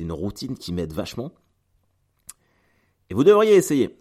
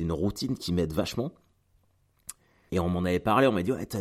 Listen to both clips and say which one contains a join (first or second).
second